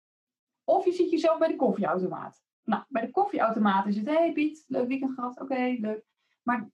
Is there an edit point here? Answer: no; 0 cuts

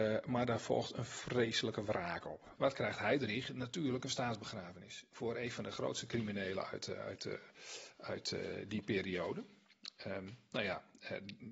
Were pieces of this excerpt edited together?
yes; 1 cut; at 2.5 s

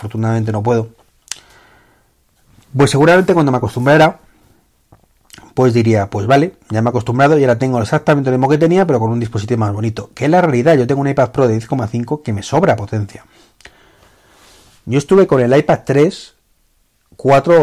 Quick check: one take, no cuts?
yes; 0 cuts

